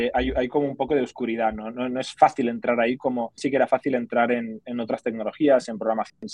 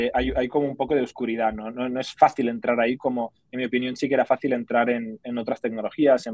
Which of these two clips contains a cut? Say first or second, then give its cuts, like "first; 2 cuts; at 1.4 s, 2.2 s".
first; 1 cut; at 3.4 s